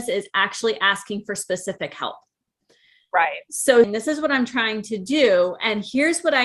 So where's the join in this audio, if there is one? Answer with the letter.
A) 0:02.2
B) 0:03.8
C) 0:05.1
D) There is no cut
B